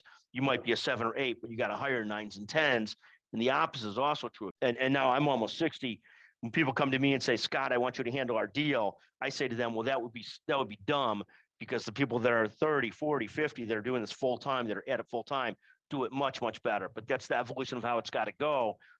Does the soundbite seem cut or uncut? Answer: cut